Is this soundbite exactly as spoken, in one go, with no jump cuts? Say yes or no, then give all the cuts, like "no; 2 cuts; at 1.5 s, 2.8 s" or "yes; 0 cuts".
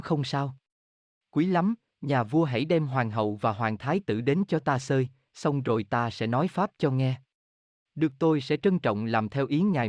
yes; 0 cuts